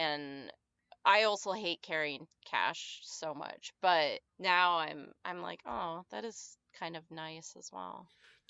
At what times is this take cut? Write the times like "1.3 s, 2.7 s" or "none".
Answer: 4.3 s